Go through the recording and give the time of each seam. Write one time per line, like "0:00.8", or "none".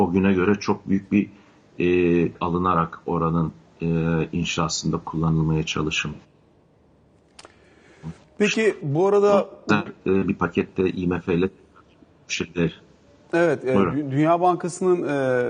0:02.3